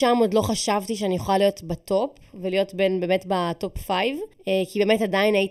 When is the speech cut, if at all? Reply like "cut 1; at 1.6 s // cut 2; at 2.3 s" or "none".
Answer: cut 1; at 4.3 s